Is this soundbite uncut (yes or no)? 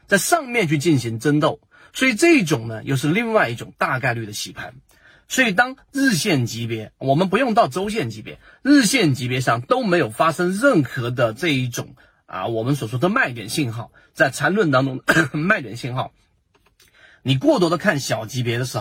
yes